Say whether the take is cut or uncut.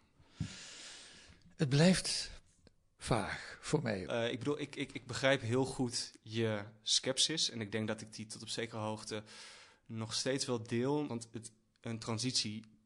cut